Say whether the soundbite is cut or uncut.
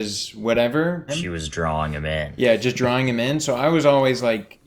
cut